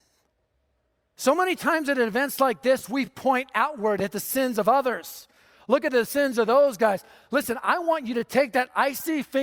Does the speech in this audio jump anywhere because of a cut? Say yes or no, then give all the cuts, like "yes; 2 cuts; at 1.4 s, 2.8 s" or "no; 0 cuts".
no; 0 cuts